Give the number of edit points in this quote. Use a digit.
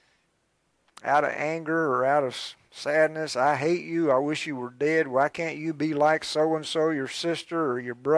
0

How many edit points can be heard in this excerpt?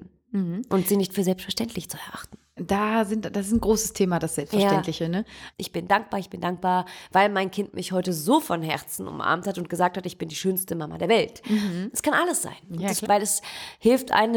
2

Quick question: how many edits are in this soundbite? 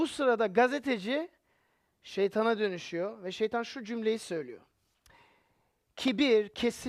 0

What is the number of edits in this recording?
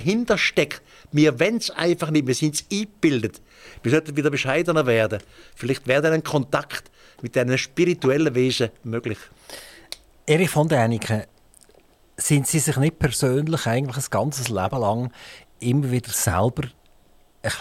0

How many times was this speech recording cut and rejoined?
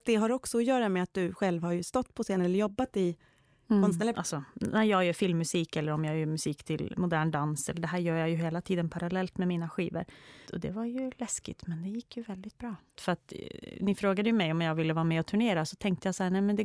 3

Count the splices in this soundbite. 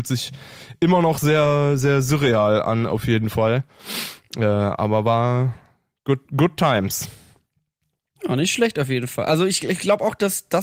0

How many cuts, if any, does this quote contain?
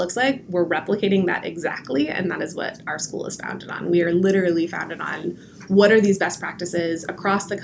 0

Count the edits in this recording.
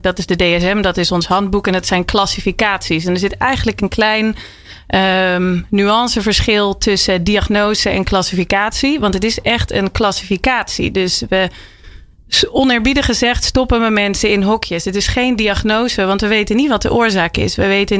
0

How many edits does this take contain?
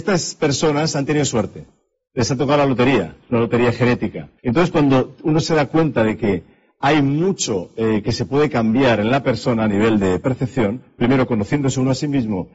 1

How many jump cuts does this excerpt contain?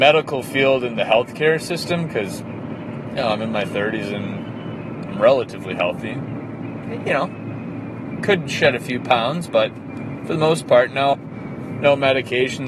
2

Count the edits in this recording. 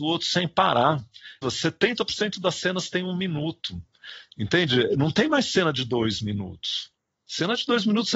1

